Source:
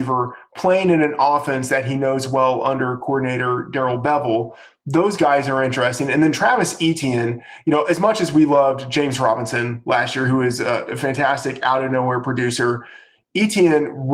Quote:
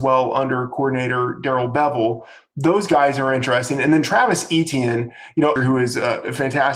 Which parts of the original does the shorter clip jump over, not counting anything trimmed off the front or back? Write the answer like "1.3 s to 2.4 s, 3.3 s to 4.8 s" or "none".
7.9 s to 10.2 s

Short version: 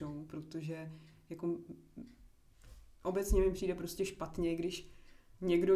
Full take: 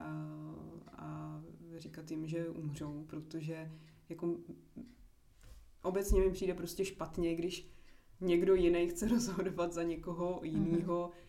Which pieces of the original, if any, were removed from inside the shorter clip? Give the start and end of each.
none

